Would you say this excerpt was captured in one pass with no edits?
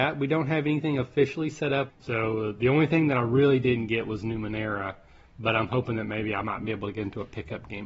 no; 1 cut; at 1.9 s

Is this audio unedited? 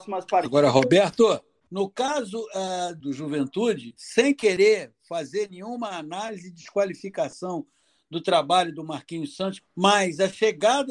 no; 3 cuts; at 1.7 s, 3.0 s, 9.6 s

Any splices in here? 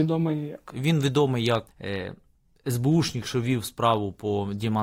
yes; 1 cut; at 1.7 s

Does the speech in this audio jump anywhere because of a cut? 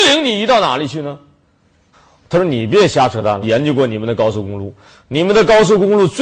yes; 2 cuts; at 1.9 s, 3.4 s

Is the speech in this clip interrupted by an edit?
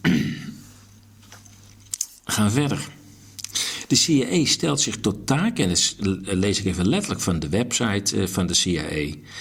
no; 0 cuts

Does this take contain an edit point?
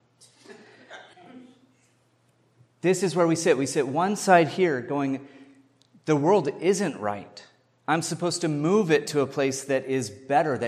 yes; 1 cut; at 1.1 s

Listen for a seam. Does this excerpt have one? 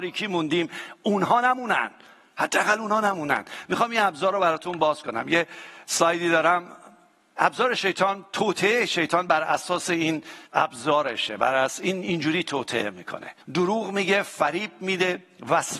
yes; 2 cuts; at 10.5 s, 13.4 s

